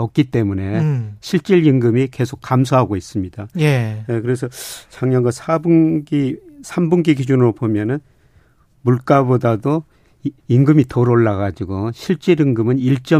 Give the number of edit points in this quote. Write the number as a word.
one